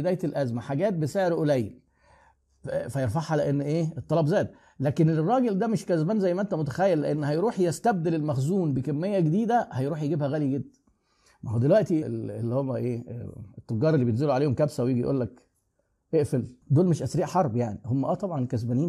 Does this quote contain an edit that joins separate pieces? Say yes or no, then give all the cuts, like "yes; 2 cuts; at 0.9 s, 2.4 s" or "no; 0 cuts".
yes; 2 cuts; at 12.0 s, 16.6 s